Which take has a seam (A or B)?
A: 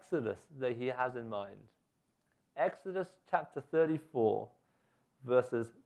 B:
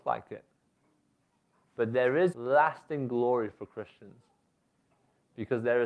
B